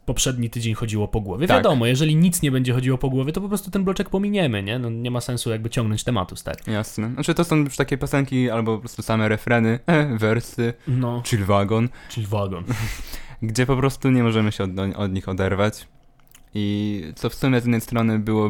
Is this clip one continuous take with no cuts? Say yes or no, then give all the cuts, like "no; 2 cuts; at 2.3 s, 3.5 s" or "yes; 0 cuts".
yes; 0 cuts